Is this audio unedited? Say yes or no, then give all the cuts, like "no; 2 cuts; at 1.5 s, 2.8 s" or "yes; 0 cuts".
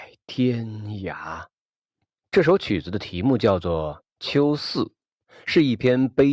no; 1 cut; at 2.2 s